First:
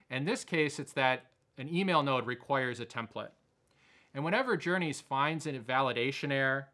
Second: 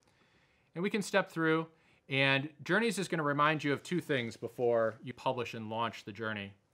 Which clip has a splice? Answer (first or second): second